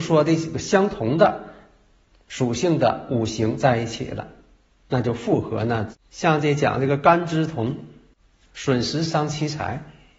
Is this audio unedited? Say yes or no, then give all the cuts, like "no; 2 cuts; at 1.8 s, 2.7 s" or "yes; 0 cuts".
no; 1 cut; at 5.9 s